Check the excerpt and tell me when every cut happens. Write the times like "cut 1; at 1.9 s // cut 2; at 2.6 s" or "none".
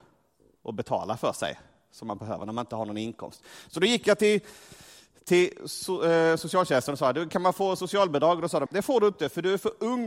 cut 1; at 8.7 s